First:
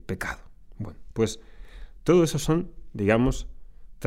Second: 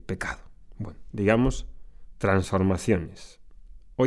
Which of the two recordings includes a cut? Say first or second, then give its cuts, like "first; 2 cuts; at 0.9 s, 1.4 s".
second; 1 cut; at 1.1 s